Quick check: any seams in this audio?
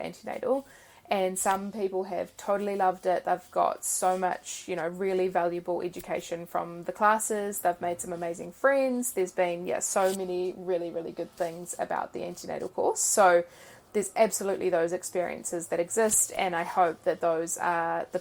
no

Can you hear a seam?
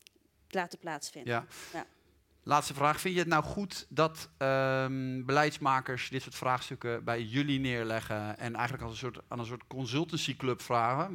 no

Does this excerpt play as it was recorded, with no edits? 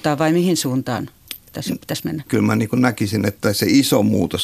no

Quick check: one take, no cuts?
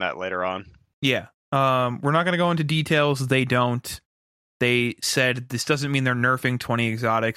yes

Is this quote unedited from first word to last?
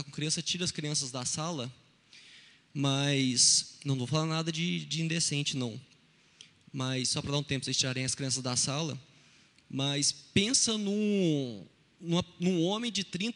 yes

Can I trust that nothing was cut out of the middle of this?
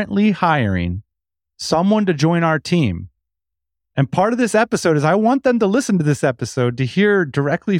yes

